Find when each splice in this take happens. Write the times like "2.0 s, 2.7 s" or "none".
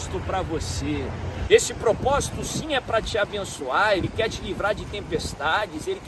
1.5 s